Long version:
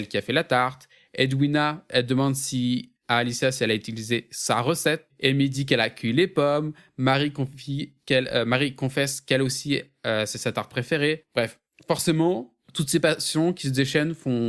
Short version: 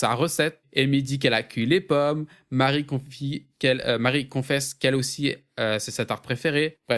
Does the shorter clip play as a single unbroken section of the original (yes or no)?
yes